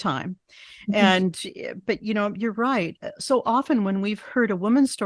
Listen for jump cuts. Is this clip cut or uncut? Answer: uncut